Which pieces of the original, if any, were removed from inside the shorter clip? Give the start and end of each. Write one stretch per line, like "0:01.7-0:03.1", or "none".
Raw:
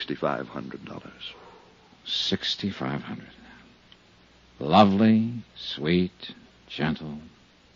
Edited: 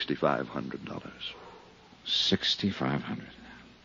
none